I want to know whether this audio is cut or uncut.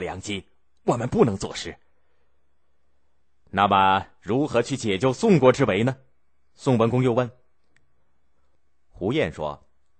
uncut